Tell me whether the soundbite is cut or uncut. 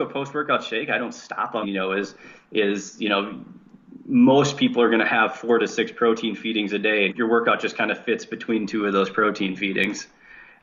cut